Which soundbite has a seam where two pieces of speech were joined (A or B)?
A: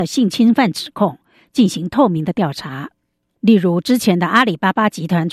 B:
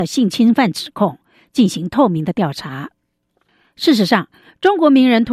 A